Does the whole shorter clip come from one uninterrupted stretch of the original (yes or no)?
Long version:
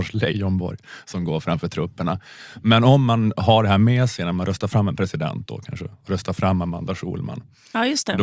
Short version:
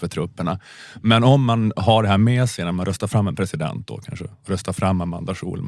yes